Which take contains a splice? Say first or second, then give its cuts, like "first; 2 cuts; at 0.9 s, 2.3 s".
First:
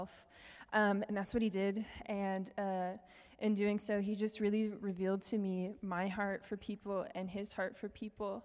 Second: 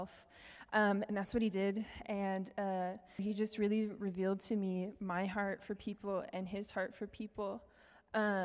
second; 1 cut; at 3.2 s